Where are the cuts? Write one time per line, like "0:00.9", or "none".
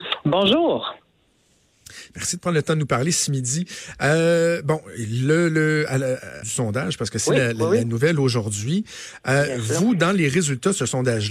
0:06.4